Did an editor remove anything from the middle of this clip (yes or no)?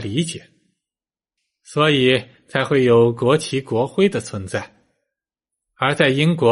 no